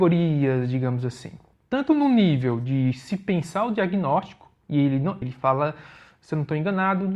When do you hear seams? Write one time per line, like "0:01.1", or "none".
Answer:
0:01.5
0:05.2